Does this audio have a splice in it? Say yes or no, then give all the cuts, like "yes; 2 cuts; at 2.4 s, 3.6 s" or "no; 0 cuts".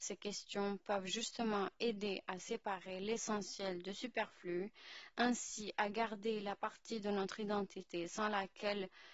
no; 0 cuts